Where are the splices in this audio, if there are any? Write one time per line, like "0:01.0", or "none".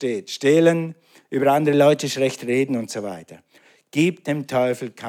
none